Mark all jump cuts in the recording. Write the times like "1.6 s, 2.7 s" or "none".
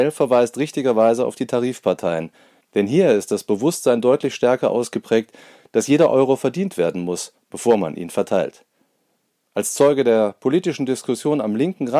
2.6 s